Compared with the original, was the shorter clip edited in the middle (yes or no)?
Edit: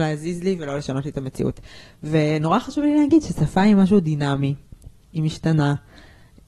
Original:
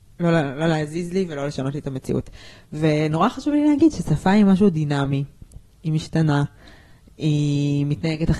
no